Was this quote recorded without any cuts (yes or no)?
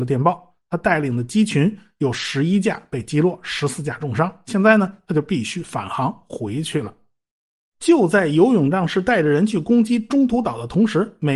yes